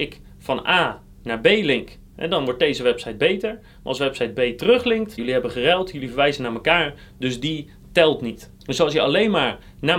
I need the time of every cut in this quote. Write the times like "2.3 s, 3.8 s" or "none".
5.2 s, 8.6 s